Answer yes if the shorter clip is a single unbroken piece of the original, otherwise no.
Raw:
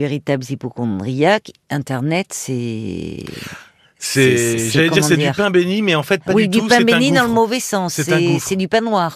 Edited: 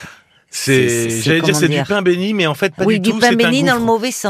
yes